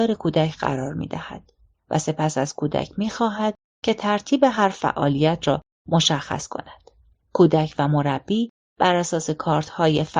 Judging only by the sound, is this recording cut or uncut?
cut